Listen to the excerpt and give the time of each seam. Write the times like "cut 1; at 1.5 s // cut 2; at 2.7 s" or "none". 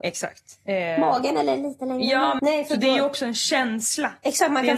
cut 1; at 2.4 s